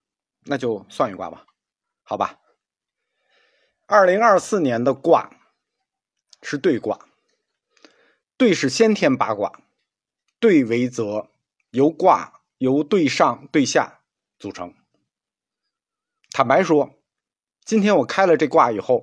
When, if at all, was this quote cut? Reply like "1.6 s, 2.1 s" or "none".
none

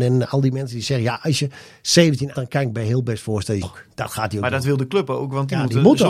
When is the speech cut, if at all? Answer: 2.3 s, 3.6 s

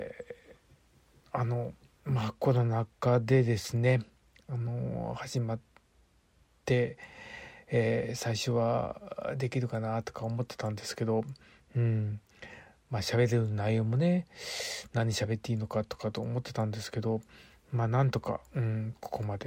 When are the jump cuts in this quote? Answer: none

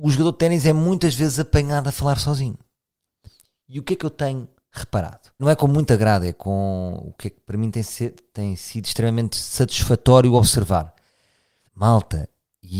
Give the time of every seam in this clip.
5.4 s, 11.7 s

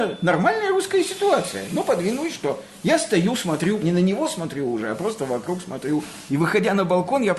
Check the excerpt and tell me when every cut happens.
3.8 s, 6.3 s

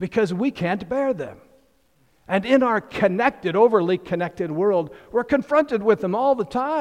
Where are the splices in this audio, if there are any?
none

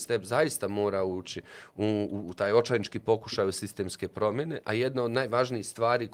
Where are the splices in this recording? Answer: 2.1 s

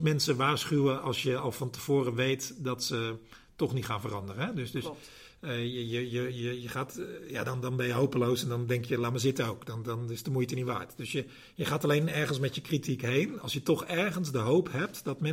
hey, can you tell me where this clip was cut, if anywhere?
none

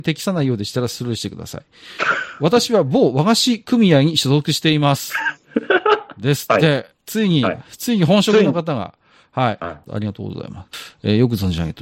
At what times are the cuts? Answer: 6.9 s, 9.9 s

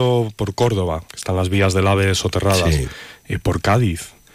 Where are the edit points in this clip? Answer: 1.1 s

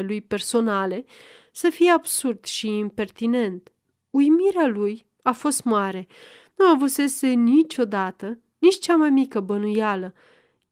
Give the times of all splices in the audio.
none

